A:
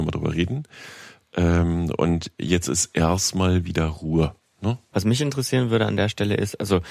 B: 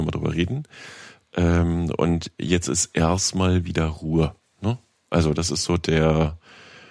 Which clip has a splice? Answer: A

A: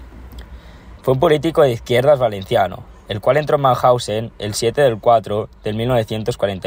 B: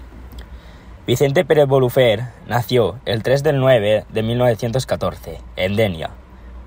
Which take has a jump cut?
A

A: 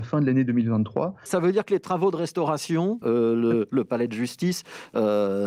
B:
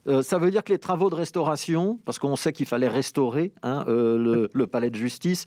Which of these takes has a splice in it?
A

